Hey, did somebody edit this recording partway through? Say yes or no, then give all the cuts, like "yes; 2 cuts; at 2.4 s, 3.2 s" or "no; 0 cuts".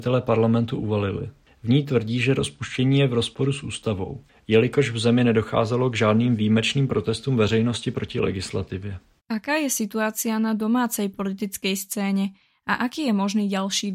yes; 1 cut; at 9.2 s